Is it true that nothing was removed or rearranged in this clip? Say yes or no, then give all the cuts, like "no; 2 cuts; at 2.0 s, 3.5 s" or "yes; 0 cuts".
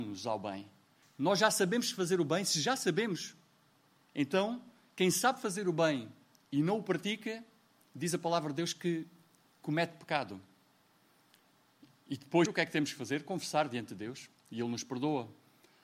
no; 2 cuts; at 1.0 s, 12.5 s